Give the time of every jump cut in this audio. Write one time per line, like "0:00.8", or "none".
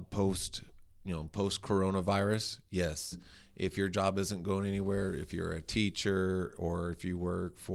none